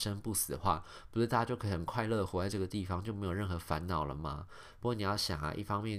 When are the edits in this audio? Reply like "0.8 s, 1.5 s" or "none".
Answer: none